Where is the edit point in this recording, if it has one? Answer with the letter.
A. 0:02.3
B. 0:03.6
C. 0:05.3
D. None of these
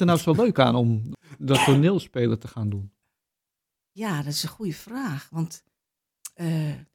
D